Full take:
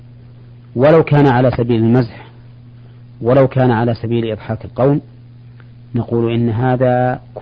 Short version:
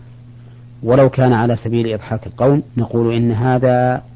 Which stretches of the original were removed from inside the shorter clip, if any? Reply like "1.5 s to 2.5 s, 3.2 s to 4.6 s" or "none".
5.1 s to 5.9 s